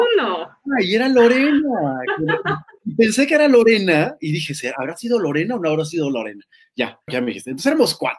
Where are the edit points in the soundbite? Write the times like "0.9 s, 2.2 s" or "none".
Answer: 7.1 s